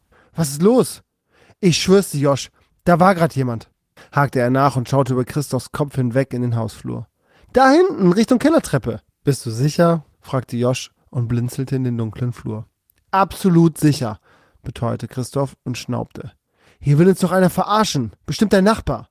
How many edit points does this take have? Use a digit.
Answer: 1